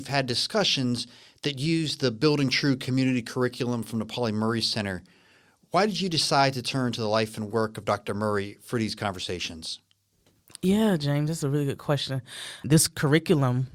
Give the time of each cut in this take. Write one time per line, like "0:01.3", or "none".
none